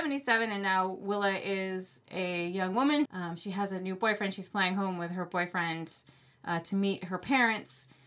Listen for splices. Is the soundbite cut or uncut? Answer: cut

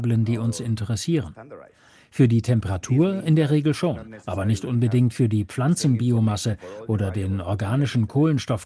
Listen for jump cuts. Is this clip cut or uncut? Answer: uncut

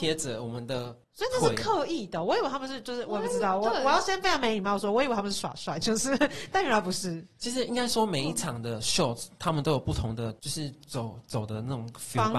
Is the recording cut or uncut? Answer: cut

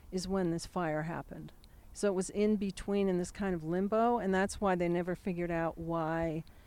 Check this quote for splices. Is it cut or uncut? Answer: uncut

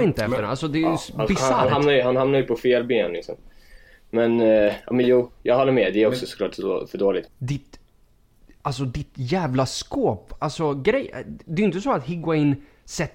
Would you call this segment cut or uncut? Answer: cut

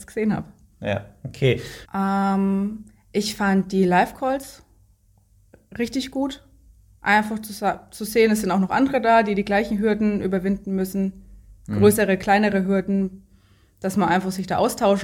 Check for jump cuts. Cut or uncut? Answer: cut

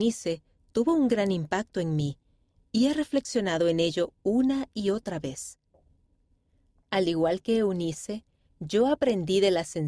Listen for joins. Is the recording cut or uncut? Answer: uncut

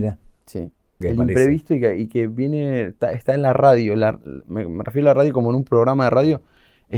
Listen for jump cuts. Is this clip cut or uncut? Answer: cut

